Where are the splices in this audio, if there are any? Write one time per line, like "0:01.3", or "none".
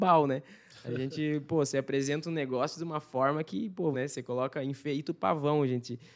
0:03.9